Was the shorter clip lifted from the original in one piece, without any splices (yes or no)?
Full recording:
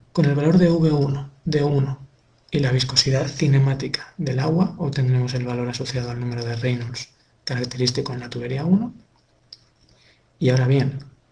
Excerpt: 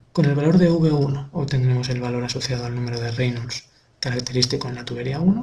no